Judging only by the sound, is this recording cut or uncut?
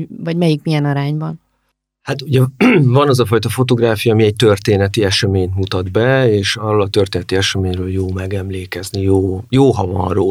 uncut